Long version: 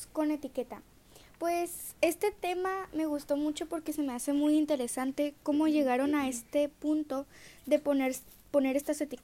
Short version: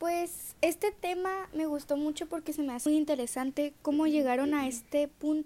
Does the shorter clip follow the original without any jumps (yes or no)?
no